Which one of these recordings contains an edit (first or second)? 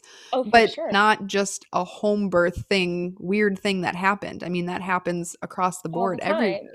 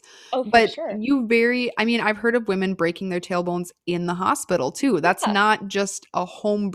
first